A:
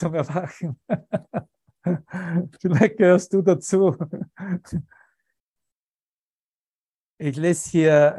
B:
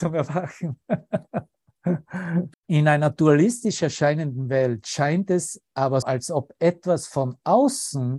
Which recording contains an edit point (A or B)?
B